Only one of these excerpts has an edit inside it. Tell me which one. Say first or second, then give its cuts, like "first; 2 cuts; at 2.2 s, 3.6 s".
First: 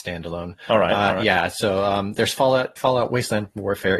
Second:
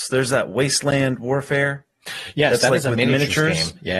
first; 1 cut; at 2.8 s